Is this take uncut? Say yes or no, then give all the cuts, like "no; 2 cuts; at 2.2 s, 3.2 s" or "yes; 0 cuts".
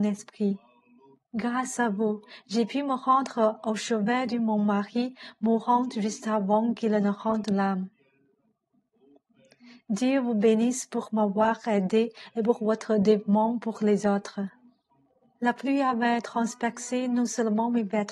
no; 2 cuts; at 1.2 s, 15.4 s